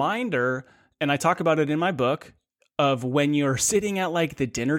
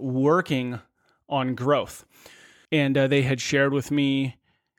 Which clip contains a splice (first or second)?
second